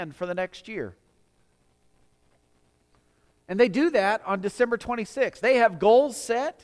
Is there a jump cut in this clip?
yes; 1 cut; at 5.4 s

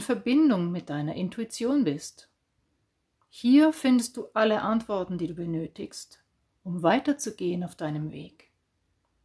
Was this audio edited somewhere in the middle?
no; 0 cuts

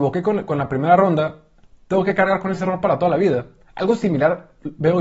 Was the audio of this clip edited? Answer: no; 0 cuts

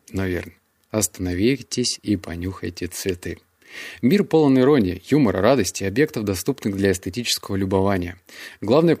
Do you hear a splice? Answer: no; 0 cuts

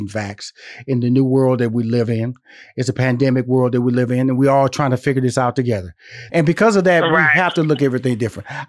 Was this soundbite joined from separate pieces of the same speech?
yes; 1 cut; at 6.3 s

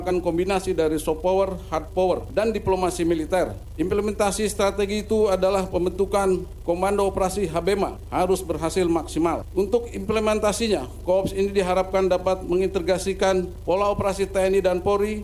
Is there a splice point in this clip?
no; 0 cuts

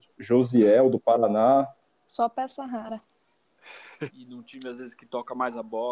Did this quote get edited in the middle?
yes; 1 cut; at 4.1 s

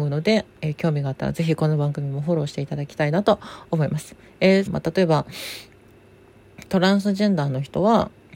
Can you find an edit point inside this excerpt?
yes; 1 cut; at 4.7 s

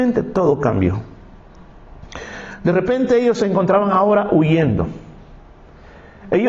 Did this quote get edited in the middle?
no; 0 cuts

